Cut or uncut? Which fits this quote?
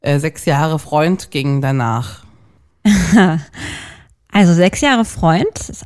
uncut